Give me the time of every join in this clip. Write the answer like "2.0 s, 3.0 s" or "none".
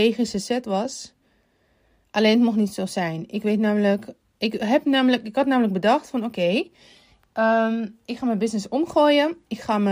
none